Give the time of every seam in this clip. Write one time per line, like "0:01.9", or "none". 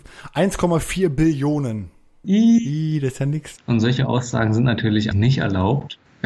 0:02.2
0:03.6
0:05.1